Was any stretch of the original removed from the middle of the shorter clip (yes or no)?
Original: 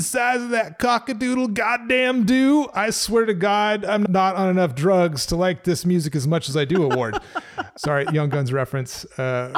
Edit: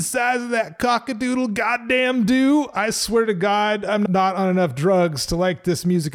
no